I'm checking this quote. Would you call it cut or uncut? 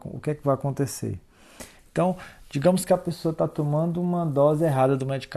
cut